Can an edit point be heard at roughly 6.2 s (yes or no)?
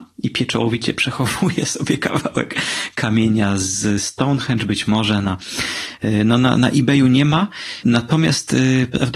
no